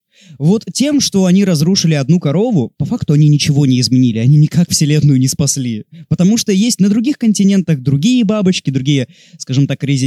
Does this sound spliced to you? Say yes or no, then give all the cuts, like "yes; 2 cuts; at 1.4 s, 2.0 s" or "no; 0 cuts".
no; 0 cuts